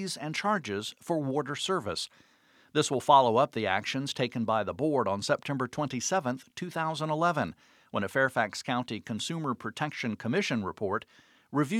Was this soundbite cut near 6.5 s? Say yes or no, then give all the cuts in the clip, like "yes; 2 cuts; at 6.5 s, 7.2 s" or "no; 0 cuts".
no; 0 cuts